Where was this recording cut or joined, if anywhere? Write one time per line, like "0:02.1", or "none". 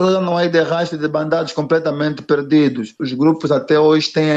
none